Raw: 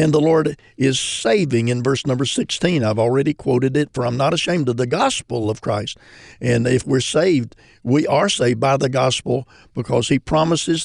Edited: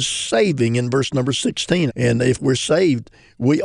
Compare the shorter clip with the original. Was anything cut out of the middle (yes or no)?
yes